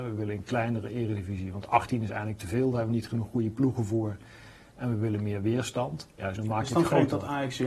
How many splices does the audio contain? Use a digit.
1